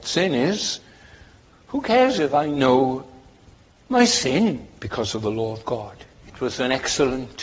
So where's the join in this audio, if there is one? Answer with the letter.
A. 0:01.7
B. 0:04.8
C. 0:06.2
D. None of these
B